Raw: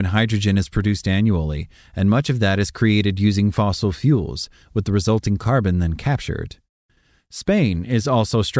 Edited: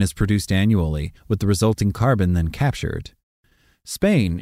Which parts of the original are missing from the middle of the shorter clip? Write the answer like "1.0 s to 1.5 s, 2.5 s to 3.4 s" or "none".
1.7 s to 4.6 s